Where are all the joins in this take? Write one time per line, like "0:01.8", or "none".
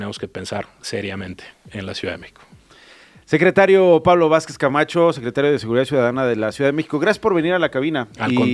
none